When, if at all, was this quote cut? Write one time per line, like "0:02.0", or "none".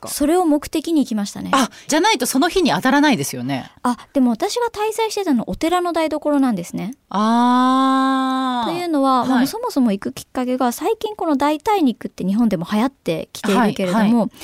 0:01.9